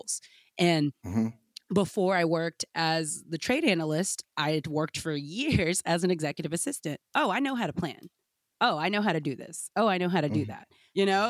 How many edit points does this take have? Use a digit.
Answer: 1